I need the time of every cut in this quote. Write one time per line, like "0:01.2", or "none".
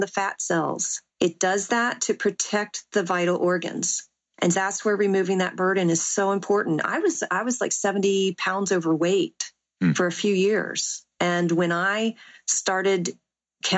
0:01.1
0:04.5